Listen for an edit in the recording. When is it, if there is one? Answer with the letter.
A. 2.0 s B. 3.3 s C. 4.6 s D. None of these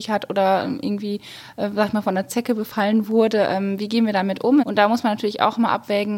C